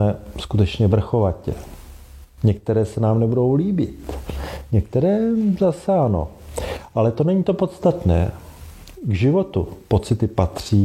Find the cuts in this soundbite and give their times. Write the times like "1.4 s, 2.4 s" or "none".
none